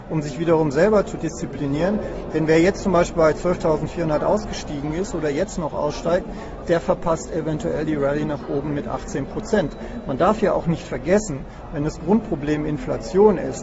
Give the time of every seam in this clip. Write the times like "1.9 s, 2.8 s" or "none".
none